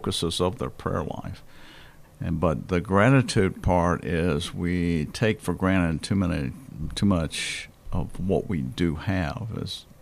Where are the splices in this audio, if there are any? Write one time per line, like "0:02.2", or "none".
0:02.0